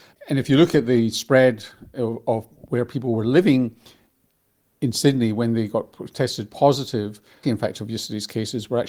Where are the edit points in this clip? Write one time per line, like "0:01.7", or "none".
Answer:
0:07.4